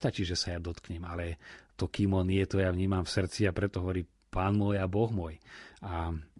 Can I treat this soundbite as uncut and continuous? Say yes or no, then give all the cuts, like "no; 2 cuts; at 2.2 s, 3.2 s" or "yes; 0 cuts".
yes; 0 cuts